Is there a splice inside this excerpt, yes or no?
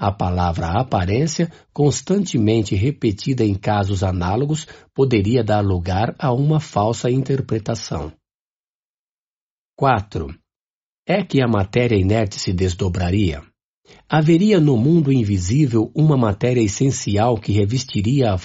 no